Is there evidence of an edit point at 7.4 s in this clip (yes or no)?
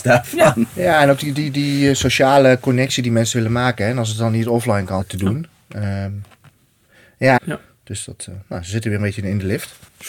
yes